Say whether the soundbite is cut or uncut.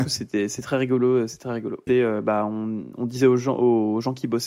cut